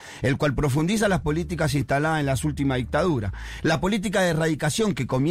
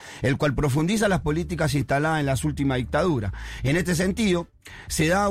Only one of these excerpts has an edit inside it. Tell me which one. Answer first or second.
first